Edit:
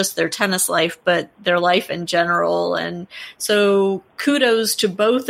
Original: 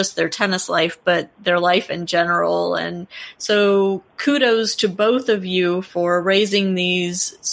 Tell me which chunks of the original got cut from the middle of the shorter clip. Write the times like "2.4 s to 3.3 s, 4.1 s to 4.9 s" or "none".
none

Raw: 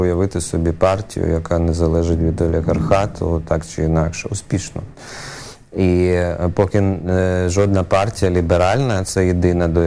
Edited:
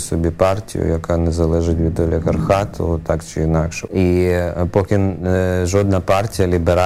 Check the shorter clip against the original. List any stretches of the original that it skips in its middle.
4.3 s to 5.7 s

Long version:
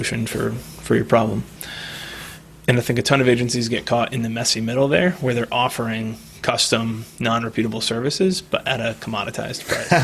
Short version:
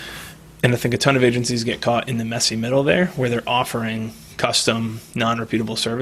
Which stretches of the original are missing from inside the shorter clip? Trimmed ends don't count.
none

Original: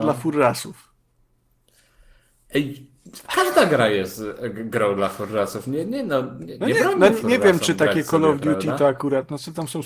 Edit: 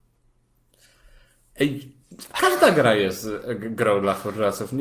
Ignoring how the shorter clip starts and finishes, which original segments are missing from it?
none

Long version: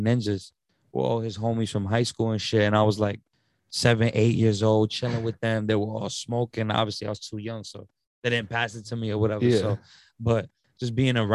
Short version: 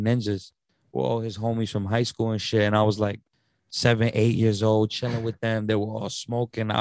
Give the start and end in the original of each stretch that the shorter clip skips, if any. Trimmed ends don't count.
none

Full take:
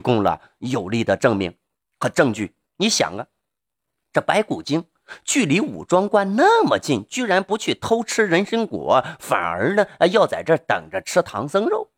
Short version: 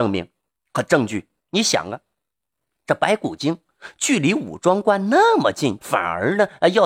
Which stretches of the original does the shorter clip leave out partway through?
7.0 s to 9.2 s

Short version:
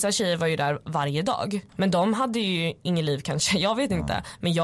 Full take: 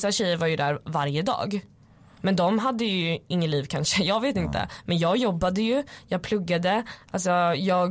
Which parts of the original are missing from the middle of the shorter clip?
1.7 s to 2.1 s

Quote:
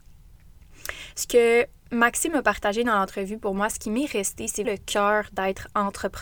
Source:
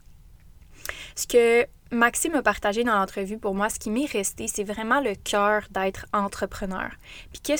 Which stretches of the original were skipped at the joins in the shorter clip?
4.6 s to 5.0 s

